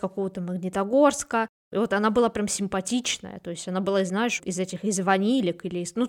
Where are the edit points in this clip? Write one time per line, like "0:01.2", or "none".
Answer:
0:04.4